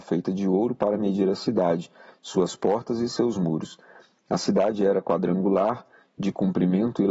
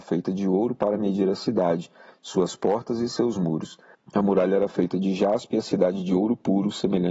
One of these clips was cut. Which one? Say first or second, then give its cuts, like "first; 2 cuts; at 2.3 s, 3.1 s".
second; 1 cut; at 3.9 s